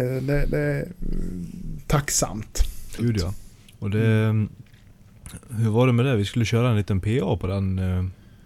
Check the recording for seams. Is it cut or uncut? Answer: cut